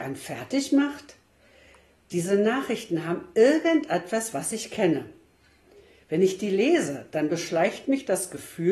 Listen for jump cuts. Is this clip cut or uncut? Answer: uncut